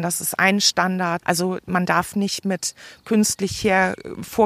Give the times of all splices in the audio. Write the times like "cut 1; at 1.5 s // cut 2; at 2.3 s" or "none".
cut 1; at 1.2 s